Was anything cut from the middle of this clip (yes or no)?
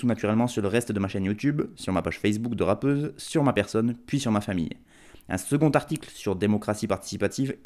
no